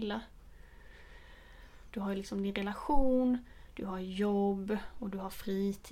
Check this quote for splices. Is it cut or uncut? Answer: cut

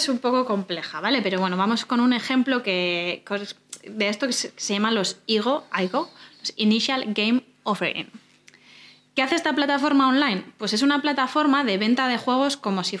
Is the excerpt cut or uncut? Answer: uncut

